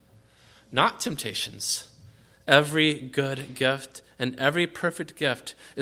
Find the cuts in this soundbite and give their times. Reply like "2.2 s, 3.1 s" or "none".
2.3 s